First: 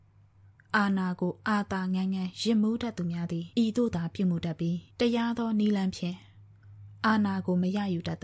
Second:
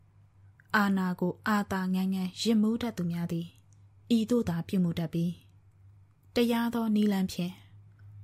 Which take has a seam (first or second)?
first